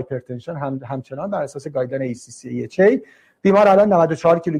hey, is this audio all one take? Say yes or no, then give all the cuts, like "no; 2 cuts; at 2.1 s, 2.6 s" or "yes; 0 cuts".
yes; 0 cuts